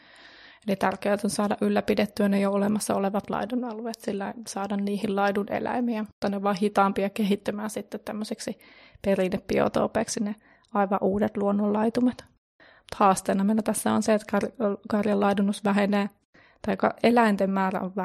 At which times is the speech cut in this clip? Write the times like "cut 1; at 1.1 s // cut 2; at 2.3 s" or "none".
cut 1; at 6.2 s